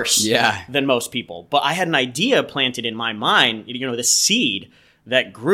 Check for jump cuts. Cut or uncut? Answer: uncut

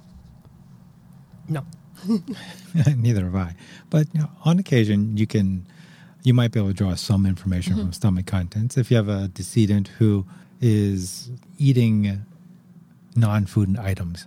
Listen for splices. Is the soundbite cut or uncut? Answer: uncut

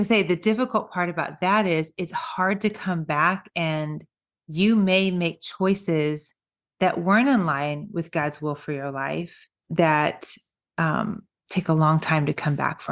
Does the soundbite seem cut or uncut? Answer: cut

